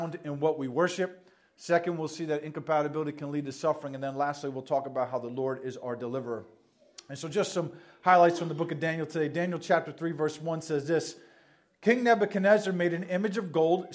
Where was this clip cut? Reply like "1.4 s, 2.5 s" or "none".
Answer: none